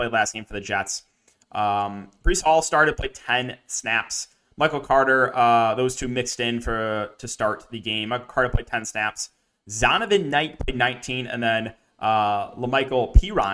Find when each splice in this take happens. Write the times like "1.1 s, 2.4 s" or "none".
none

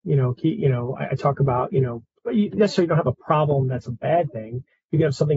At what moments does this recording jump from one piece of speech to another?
none

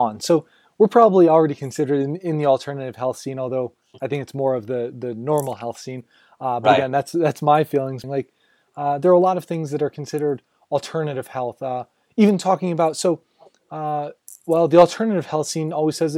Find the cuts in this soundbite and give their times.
8.0 s

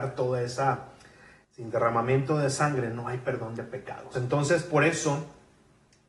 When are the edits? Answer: 1.4 s, 4.1 s

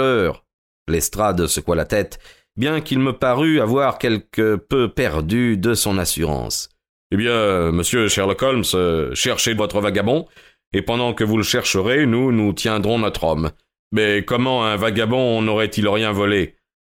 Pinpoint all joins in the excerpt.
9.6 s, 13.8 s

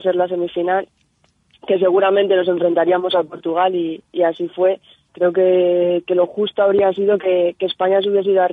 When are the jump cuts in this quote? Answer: 5.1 s

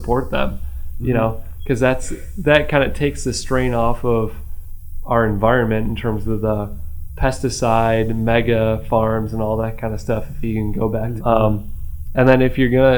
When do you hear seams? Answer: 11.2 s

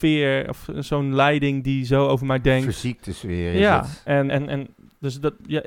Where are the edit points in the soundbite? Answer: 4.3 s

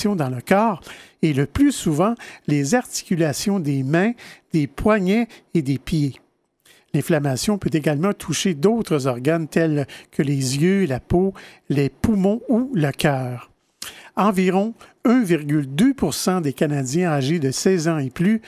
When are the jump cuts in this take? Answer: none

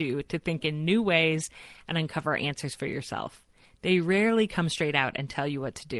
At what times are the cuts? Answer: none

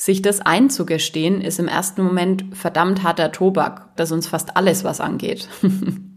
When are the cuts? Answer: 4.0 s

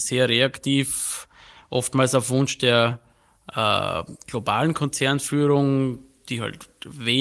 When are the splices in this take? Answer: none

